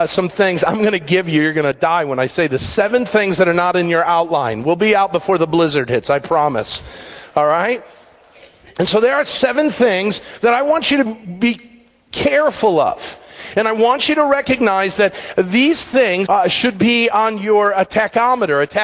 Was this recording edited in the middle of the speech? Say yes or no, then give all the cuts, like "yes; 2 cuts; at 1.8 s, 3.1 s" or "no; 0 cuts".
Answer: yes; 2 cuts; at 11.1 s, 16.3 s